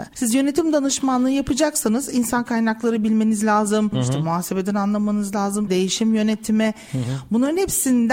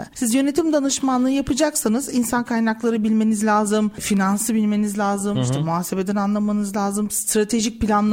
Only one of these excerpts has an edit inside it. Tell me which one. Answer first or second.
first